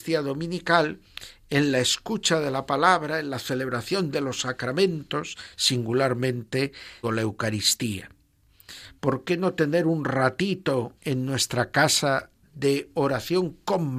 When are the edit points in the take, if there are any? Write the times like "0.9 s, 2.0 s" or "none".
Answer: 7.0 s, 9.0 s, 11.0 s